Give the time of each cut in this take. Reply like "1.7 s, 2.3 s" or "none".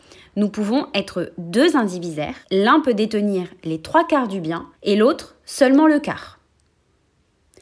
2.4 s, 4.7 s